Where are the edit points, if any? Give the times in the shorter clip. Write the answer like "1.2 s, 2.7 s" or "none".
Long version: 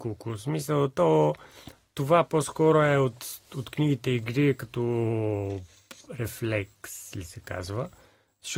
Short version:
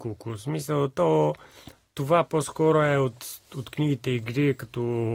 none